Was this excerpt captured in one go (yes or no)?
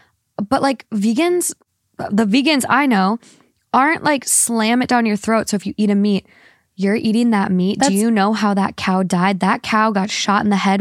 yes